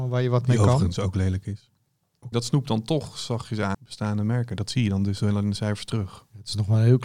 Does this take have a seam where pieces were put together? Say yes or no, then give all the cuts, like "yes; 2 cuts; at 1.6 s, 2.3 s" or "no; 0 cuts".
yes; 2 cuts; at 2.3 s, 3.7 s